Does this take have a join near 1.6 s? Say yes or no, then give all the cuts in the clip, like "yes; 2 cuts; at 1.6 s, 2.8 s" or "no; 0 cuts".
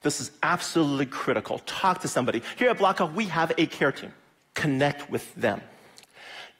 no; 1 cut; at 4.4 s